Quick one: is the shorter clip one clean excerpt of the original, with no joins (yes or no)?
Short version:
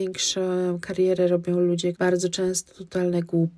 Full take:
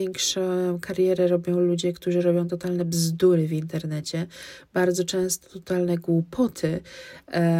no